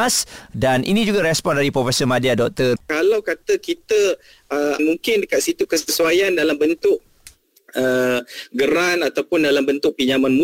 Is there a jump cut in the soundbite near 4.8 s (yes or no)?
yes